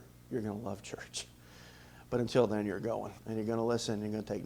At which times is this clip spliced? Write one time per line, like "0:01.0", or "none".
0:03.2